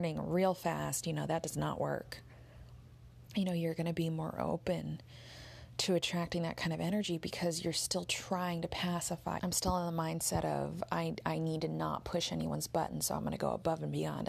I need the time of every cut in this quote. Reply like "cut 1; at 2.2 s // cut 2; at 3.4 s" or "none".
cut 1; at 3.3 s // cut 2; at 9.4 s